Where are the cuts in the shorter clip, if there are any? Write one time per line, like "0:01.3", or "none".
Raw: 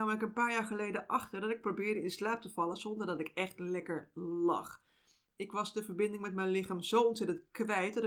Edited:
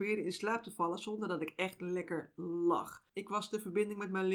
0:03.1